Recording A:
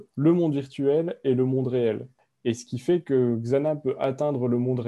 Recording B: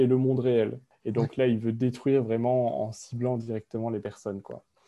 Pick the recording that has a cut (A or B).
B